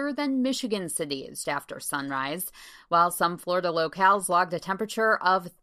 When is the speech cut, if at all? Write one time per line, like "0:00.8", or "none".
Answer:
0:01.4